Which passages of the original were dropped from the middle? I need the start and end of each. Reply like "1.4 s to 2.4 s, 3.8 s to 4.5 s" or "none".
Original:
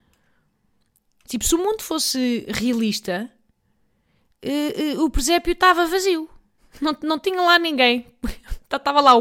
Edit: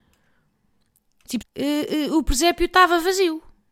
1.4 s to 4.3 s